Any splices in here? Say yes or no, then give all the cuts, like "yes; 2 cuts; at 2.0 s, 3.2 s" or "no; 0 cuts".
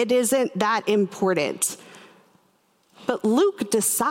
no; 0 cuts